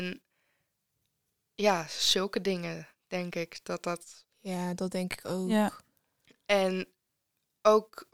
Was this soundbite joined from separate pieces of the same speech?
no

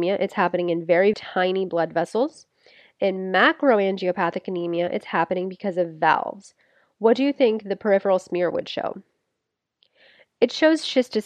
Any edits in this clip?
yes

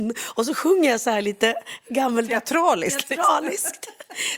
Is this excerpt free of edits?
yes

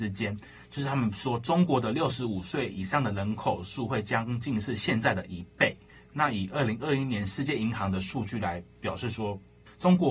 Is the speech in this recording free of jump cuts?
no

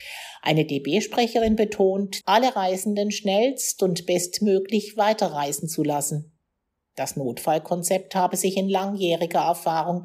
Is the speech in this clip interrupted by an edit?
yes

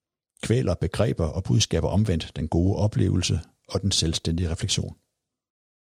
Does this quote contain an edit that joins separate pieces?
no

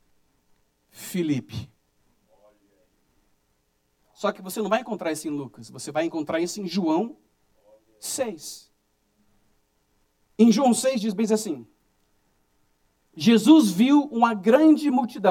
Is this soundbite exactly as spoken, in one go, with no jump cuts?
yes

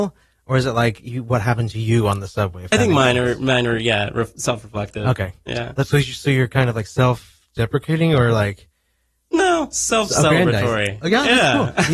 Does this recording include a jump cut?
no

